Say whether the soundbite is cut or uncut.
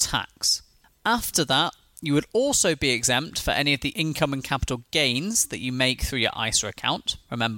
uncut